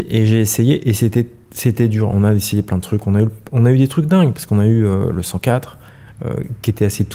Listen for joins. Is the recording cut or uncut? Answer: uncut